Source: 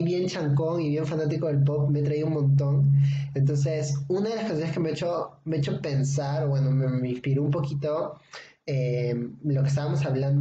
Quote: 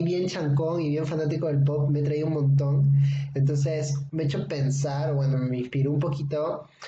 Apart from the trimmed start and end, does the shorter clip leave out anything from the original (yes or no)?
yes